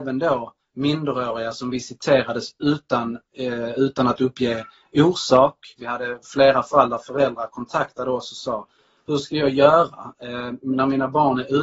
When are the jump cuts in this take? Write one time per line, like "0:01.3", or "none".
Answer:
0:05.8